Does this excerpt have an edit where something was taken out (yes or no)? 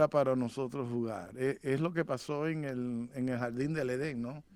no